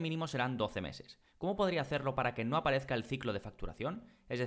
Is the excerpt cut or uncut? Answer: uncut